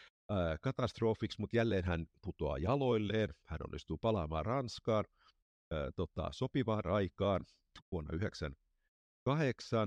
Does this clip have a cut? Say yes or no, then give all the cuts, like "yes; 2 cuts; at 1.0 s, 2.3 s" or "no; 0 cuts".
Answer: no; 0 cuts